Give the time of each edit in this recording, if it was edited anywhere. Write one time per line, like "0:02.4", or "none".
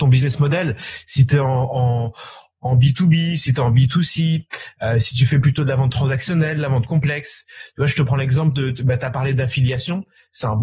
none